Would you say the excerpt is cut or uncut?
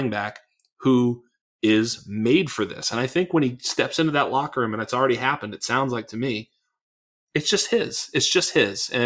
uncut